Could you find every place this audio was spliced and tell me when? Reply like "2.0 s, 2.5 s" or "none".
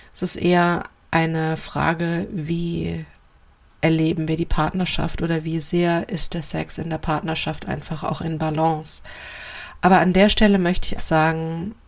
11.0 s